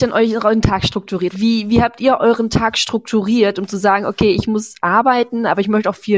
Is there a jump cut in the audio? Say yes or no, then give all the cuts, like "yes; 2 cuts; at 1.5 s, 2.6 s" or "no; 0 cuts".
yes; 1 cut; at 1.3 s